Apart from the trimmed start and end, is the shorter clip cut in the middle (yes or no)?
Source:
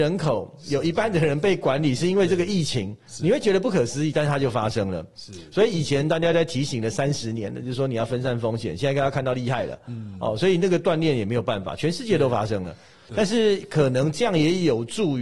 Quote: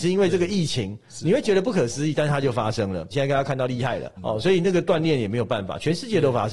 yes